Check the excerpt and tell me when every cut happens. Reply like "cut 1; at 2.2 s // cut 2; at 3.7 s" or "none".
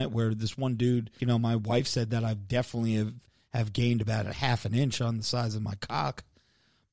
cut 1; at 1.2 s